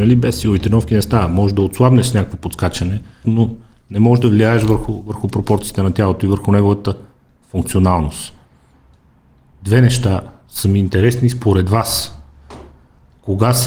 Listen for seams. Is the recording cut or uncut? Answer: cut